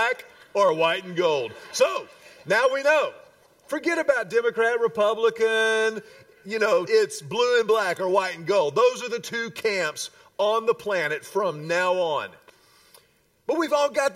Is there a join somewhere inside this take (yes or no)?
yes